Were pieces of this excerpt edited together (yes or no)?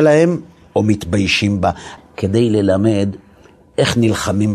yes